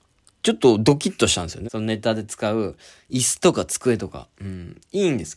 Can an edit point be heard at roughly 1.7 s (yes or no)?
yes